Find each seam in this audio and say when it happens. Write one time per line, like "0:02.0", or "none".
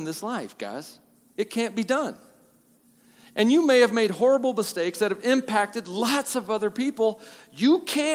none